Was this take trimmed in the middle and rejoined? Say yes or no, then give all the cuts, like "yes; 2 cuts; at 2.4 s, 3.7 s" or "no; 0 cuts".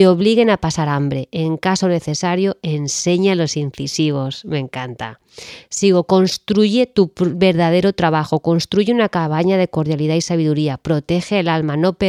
no; 0 cuts